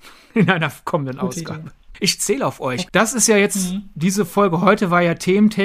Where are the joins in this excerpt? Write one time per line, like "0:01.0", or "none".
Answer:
0:02.9